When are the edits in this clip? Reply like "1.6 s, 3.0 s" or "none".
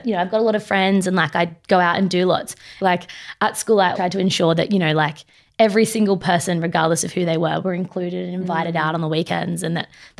2.8 s, 4.0 s